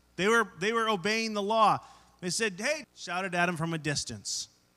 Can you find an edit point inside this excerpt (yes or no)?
yes